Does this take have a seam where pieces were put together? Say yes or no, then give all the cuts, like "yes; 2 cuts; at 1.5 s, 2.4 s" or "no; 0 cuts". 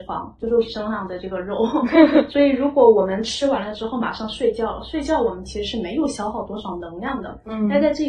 no; 0 cuts